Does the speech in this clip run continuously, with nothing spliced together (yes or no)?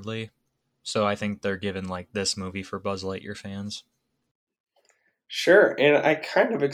yes